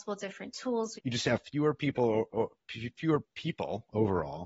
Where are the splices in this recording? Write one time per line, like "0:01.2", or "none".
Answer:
0:01.0
0:03.2